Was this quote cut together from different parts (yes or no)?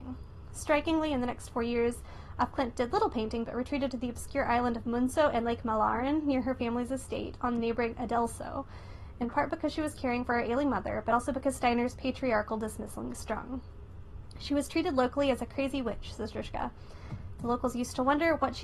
no